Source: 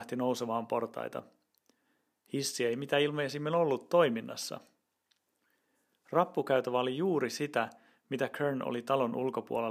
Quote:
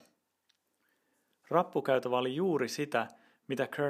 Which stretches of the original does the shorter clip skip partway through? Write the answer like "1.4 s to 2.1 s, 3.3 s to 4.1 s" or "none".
none